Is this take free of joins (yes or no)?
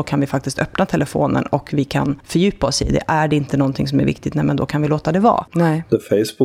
no